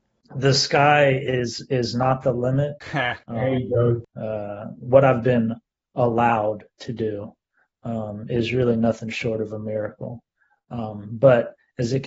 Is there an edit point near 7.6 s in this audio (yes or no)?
no